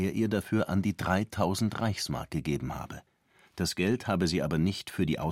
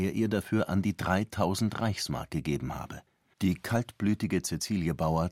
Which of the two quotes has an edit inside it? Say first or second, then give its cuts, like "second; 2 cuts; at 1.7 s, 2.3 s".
second; 1 cut; at 3.3 s